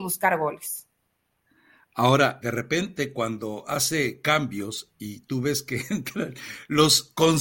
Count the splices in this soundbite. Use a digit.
1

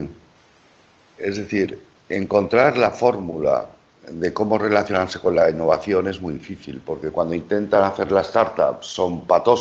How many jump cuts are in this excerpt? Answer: 0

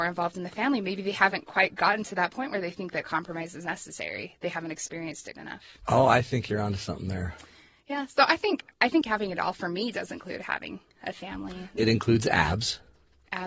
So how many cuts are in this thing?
3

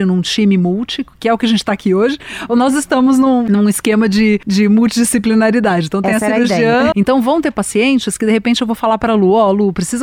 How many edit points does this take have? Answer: 1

